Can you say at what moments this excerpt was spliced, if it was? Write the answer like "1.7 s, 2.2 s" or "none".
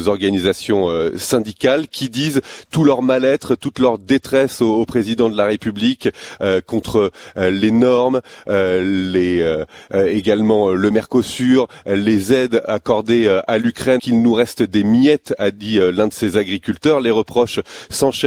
14.0 s